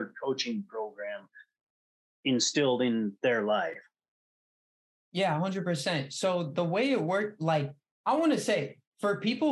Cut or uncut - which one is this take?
uncut